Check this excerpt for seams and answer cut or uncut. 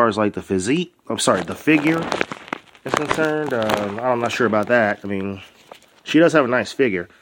uncut